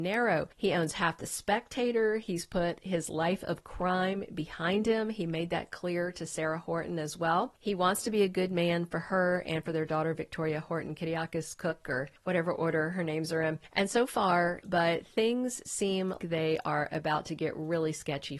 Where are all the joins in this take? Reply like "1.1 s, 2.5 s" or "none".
14.6 s, 16.2 s